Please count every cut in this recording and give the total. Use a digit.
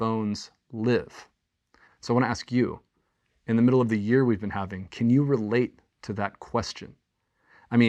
1